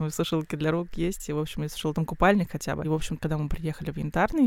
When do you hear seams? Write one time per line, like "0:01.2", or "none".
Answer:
0:02.8